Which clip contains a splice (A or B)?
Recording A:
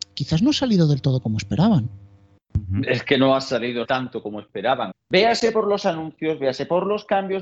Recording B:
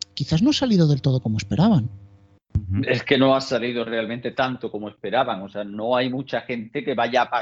A